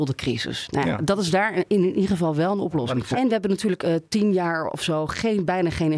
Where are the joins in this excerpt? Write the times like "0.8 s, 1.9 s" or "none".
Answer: none